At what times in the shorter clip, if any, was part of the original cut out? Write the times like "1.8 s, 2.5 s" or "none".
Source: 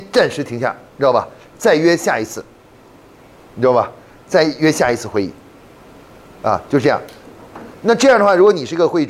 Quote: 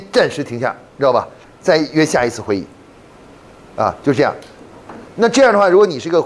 1.4 s